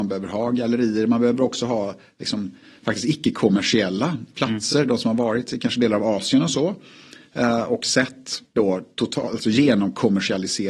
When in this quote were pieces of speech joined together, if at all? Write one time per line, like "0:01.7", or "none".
none